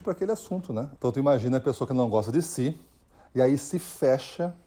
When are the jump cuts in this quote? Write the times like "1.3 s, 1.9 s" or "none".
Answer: 1.0 s